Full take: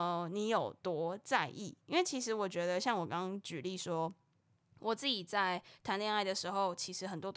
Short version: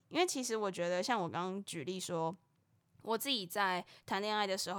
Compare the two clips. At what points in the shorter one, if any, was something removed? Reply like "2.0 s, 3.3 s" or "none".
none